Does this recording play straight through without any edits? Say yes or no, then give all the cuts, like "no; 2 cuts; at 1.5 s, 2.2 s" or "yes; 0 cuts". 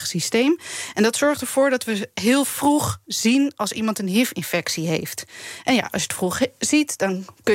yes; 0 cuts